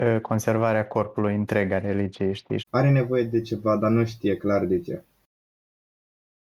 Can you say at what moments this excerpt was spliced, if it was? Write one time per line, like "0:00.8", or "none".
0:02.6